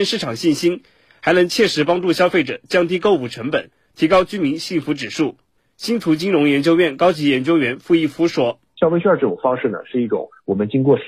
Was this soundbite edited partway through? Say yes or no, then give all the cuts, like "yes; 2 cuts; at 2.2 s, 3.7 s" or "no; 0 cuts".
no; 0 cuts